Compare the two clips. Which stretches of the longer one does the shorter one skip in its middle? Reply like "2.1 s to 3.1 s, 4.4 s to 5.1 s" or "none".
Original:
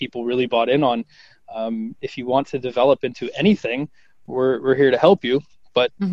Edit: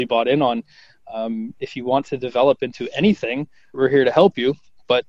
4.2 s to 4.6 s